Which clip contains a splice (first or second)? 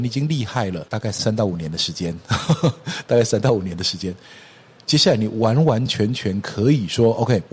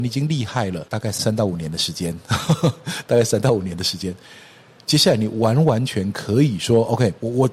second